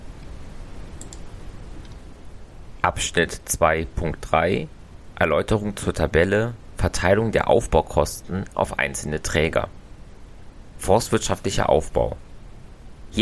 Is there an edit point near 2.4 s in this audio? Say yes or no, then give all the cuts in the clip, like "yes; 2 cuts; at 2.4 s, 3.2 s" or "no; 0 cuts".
no; 1 cut; at 10.7 s